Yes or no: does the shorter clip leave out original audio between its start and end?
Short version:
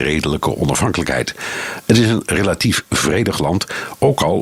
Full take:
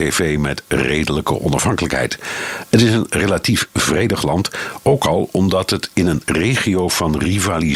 no